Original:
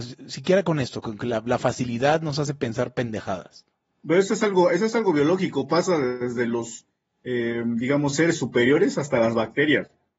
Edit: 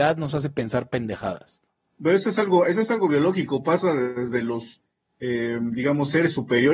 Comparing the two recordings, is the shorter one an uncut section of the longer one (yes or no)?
yes